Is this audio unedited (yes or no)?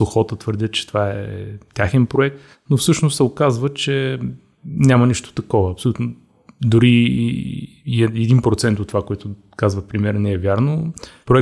yes